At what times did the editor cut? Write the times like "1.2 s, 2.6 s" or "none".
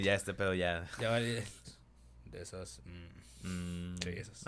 1.6 s